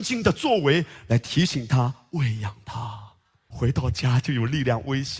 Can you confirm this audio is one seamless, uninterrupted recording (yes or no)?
no